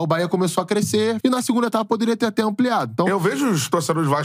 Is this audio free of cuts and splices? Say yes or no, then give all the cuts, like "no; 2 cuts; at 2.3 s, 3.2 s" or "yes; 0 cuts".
no; 1 cut; at 1.2 s